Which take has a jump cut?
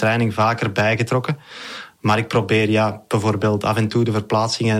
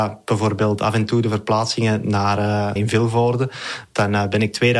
second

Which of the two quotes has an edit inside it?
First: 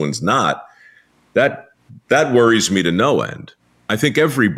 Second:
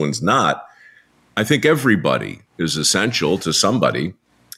second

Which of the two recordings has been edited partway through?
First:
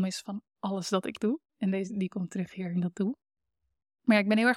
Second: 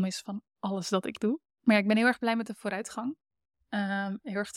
second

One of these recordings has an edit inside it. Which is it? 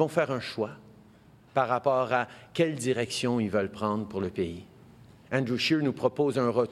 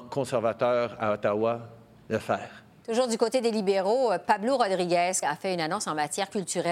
second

